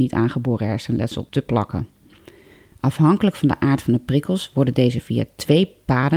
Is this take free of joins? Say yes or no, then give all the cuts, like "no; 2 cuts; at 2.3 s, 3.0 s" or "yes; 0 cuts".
no; 1 cut; at 2.7 s